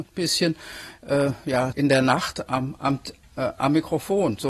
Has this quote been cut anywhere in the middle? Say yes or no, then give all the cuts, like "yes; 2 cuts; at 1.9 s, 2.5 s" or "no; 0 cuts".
yes; 1 cut; at 1.7 s